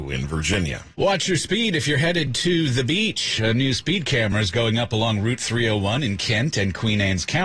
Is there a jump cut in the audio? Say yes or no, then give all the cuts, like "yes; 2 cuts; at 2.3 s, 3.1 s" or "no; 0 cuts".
yes; 1 cut; at 0.9 s